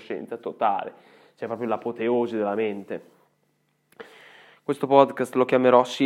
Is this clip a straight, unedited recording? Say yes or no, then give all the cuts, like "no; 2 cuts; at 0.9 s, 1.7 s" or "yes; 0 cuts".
yes; 0 cuts